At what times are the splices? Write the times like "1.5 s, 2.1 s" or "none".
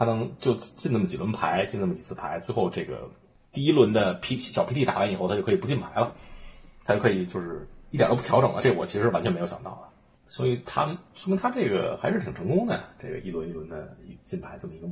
none

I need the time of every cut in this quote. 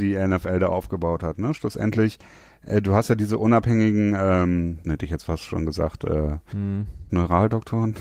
4.8 s, 7.1 s

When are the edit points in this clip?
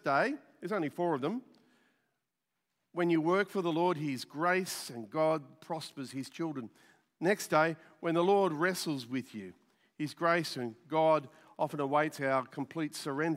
none

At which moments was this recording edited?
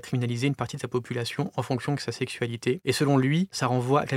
none

